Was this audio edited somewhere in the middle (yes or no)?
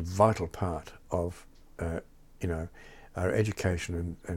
no